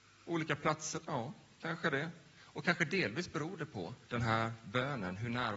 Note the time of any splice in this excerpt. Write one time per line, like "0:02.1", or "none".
0:04.1